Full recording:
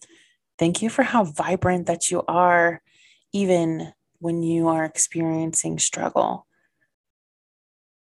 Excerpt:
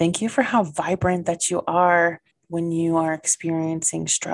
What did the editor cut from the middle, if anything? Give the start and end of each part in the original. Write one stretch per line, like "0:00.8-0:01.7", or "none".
0:02.9-0:04.0

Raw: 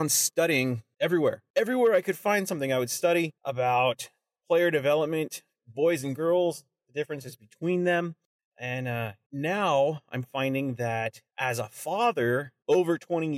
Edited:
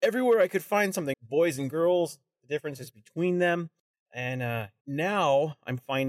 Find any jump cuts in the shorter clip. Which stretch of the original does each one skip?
0:02.7-0:05.6

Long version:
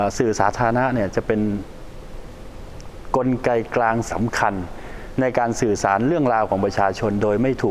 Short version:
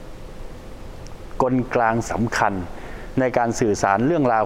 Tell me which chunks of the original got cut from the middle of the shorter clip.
0:03.4-0:03.7

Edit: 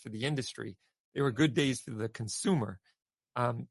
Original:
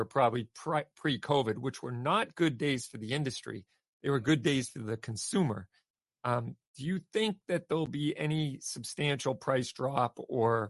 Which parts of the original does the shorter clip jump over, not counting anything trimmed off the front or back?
none

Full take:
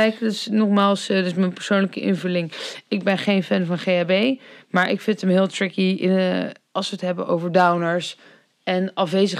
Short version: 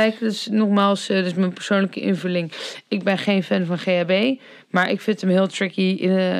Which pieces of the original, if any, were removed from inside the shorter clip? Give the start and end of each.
none

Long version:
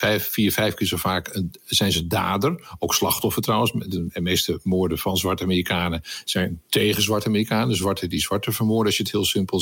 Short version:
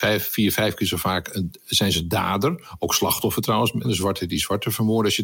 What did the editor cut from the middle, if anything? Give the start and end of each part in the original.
0:03.8-0:07.7

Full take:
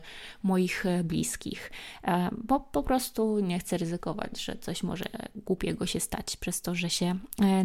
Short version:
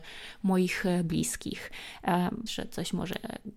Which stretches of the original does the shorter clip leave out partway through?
0:02.5-0:04.4

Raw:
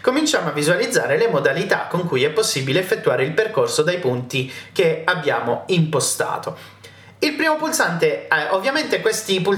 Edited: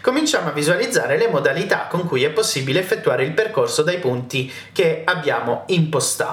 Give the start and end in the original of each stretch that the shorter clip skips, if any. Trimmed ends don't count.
none

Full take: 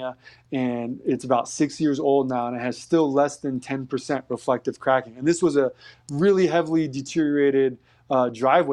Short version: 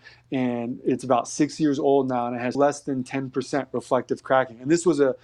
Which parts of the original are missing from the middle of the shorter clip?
0:02.8-0:03.1

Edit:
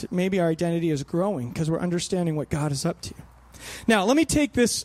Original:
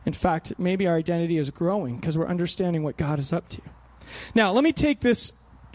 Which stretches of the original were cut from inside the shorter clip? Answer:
none

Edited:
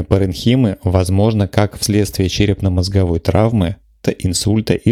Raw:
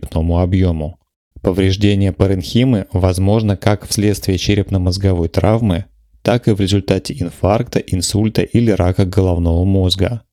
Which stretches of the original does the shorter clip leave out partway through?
0:06.1-0:07.7

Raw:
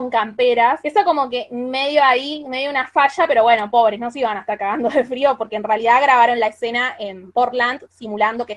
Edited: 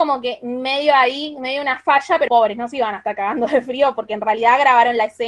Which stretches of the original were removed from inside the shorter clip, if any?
0:03.4-0:03.7

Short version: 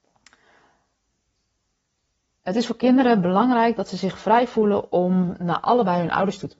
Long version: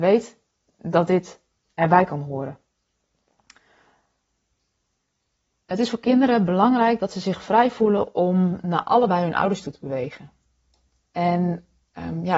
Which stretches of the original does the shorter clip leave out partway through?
none

